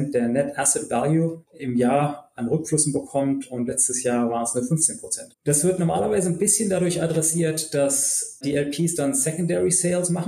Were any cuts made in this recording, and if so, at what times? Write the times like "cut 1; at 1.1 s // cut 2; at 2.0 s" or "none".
cut 1; at 5.3 s